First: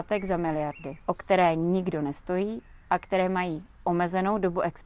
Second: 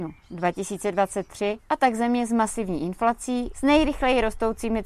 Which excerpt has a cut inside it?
second; 2 cuts; at 1.6 s, 3.5 s

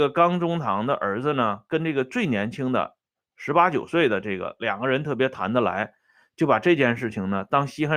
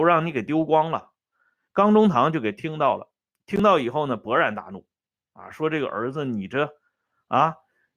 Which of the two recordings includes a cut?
second; 1 cut; at 1.7 s

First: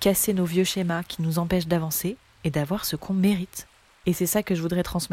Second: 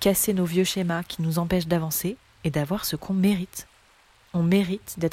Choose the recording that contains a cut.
first; 1 cut; at 4.0 s

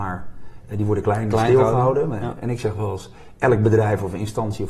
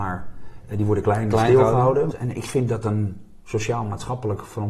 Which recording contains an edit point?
second; 1 cut; at 2.1 s

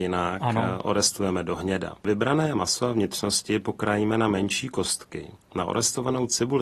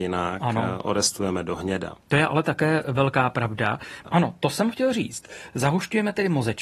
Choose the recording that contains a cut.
second; 2 cuts; at 2.0 s, 4.0 s

